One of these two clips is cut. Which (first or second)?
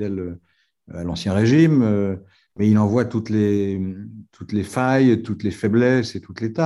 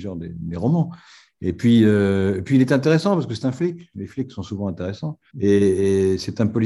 second